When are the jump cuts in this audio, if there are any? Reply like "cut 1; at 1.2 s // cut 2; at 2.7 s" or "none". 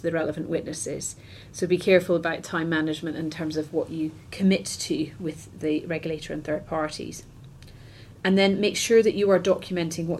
cut 1; at 8.2 s